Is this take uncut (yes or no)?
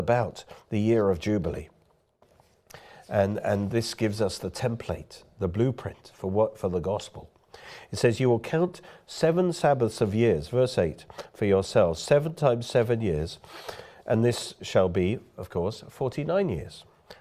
yes